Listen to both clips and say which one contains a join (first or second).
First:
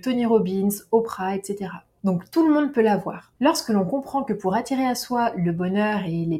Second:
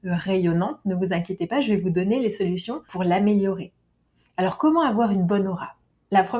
first